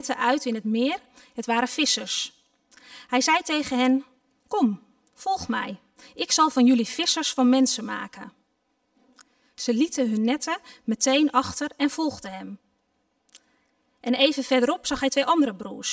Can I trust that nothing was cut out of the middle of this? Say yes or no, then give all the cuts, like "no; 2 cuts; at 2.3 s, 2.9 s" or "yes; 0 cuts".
yes; 0 cuts